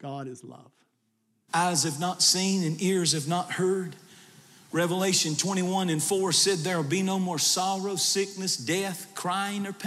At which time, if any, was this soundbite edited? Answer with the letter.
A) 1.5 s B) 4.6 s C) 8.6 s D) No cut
A